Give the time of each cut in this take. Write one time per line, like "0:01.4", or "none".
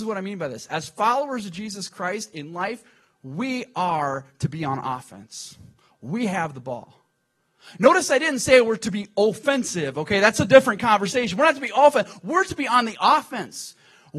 none